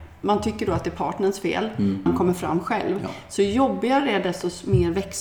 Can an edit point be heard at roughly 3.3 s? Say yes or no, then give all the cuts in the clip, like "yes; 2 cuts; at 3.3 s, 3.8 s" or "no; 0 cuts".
no; 1 cut; at 2.1 s